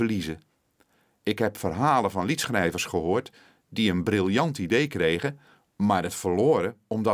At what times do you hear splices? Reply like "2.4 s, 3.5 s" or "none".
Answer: none